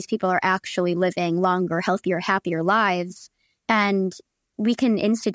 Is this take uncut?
yes; 0 cuts

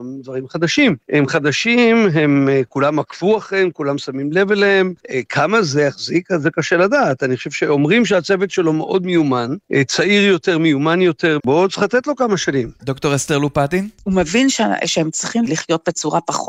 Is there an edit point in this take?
yes; 1 cut; at 11.4 s

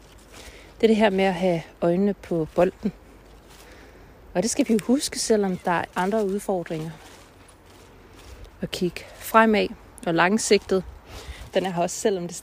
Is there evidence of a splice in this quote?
yes; 2 cuts; at 5.9 s, 11.5 s

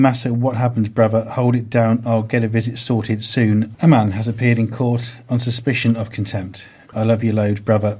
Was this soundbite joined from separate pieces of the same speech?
yes; 2 cuts; at 3.7 s, 6.9 s

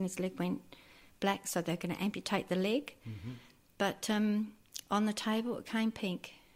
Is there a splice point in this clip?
no; 0 cuts

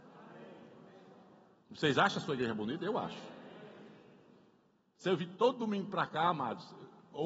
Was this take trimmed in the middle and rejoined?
no; 0 cuts

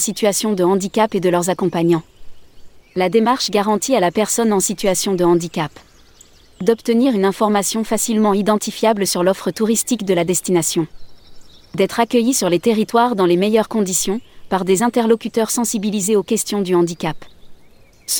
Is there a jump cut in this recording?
yes; 1 cut; at 2.8 s

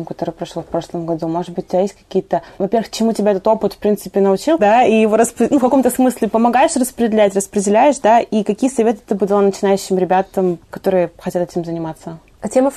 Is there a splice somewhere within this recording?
yes; 1 cut; at 4.6 s

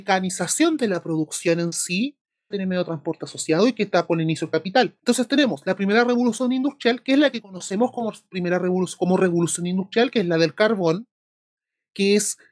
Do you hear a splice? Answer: yes; 2 cuts; at 2.5 s, 5.0 s

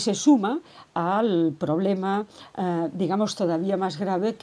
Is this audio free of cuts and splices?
yes; 0 cuts

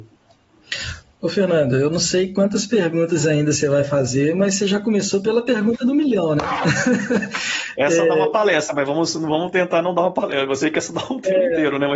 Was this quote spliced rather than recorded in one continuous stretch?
no; 0 cuts

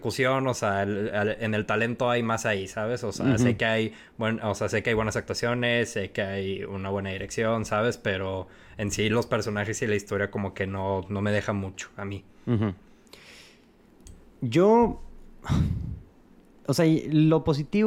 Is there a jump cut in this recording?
no; 0 cuts

